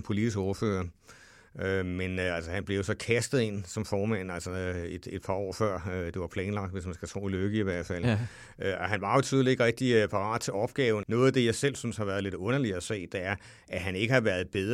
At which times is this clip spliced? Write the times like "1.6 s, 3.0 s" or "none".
11.0 s